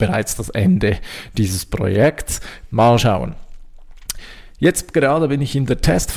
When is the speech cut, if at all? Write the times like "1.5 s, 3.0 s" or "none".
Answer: 2.7 s